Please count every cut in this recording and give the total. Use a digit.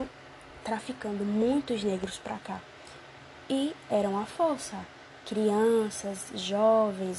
0